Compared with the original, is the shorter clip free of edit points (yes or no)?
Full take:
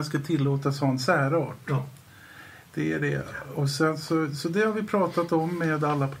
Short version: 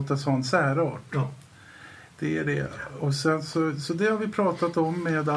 yes